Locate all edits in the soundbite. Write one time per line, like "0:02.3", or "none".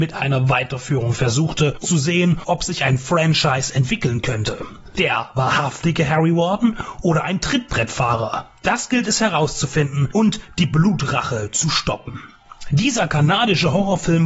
0:01.8
0:05.0